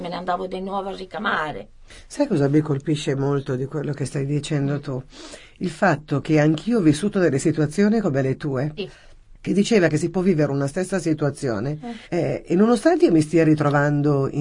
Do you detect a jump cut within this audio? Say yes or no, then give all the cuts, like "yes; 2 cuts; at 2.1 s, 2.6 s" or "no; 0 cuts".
yes; 2 cuts; at 8.8 s, 12.0 s